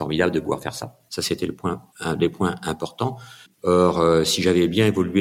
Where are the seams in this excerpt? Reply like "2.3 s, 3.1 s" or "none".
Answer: 1.1 s, 3.5 s

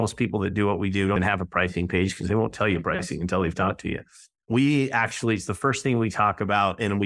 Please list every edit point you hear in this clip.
1.2 s

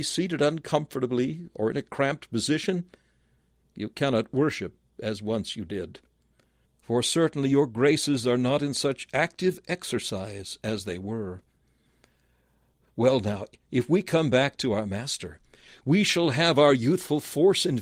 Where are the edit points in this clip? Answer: 6.7 s

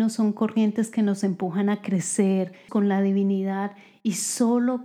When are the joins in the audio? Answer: 2.7 s

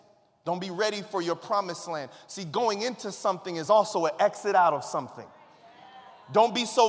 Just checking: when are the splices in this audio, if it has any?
none

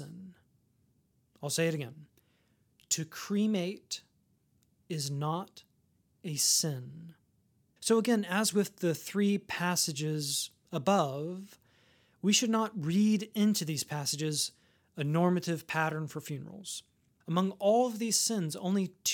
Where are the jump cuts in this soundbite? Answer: 7.8 s, 17.2 s

